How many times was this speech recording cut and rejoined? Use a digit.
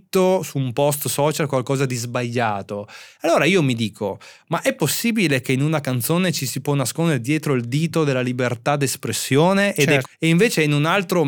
1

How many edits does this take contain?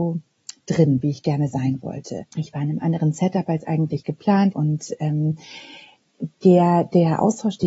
2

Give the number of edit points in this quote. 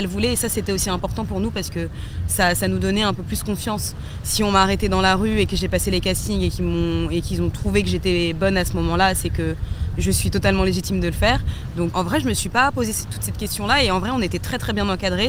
2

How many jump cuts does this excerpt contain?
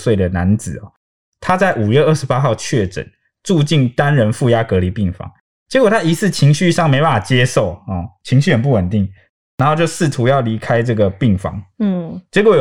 0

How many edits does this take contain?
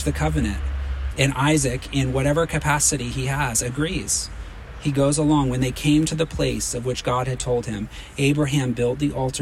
1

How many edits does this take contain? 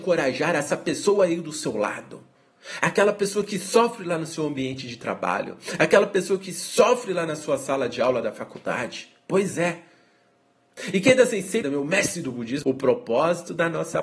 2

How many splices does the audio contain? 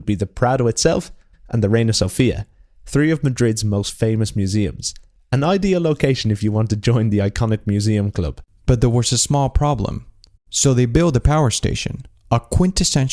2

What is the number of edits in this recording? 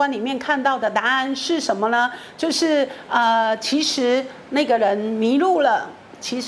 0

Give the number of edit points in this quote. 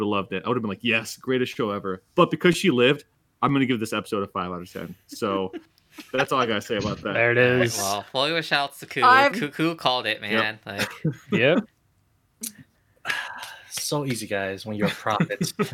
1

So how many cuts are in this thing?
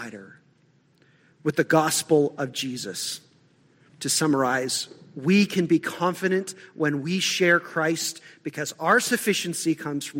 1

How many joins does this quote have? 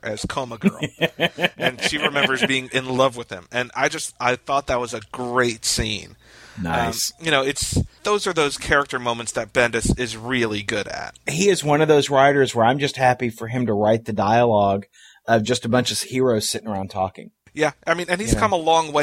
0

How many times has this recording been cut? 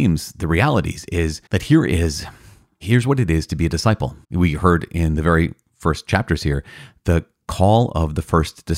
2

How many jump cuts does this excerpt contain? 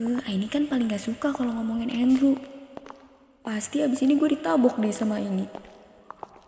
0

